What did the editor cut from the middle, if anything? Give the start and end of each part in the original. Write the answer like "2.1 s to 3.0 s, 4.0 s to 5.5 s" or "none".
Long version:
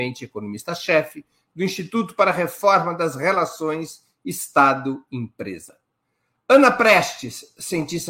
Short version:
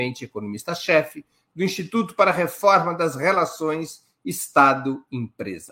none